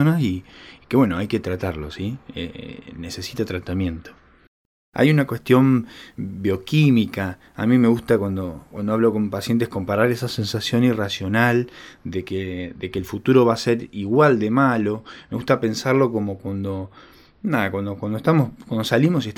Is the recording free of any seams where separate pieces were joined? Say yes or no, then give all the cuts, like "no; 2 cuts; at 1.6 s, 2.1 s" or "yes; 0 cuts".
yes; 0 cuts